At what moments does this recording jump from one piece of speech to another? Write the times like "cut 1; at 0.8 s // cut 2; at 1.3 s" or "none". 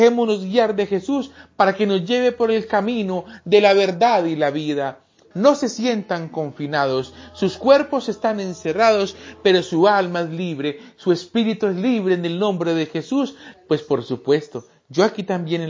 cut 1; at 5.3 s // cut 2; at 13.5 s